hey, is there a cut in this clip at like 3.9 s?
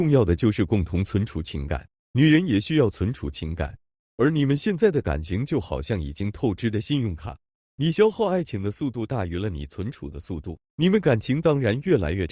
no; 1 cut; at 2.1 s

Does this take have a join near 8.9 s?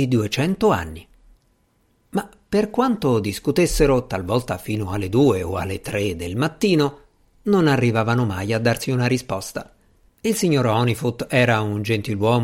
no; 2 cuts; at 2.0 s, 10.1 s

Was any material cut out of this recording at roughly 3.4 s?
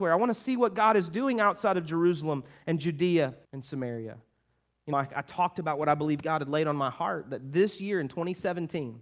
yes; 2 cuts; at 3.4 s, 4.9 s

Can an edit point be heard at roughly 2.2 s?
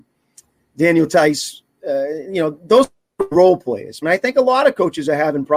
no; 1 cut; at 4.0 s

